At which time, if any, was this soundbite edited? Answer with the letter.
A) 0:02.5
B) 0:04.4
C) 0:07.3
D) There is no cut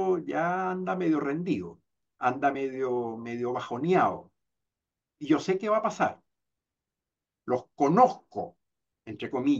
D